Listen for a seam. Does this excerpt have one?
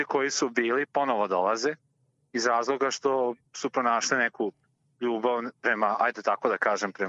no; 0 cuts

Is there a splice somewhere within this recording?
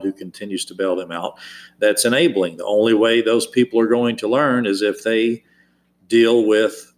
no; 0 cuts

